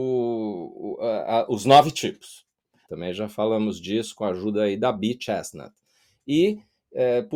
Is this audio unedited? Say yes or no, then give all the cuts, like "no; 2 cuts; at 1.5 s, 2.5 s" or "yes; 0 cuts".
no; 1 cut; at 2.9 s